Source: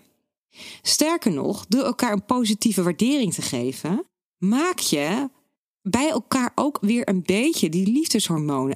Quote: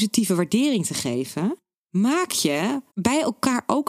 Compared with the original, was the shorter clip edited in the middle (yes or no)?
yes